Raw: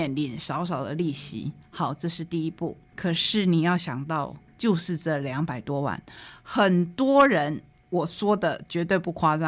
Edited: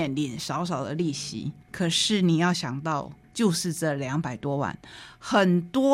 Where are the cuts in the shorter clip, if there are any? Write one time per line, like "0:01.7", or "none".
0:01.6